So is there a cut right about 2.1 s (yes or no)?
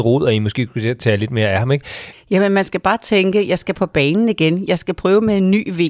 yes